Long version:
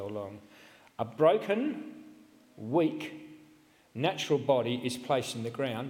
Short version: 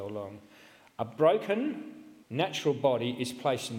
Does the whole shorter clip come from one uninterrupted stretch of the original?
no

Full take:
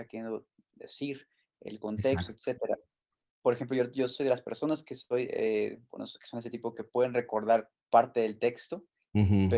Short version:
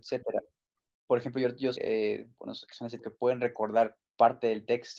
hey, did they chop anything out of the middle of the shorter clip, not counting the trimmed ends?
yes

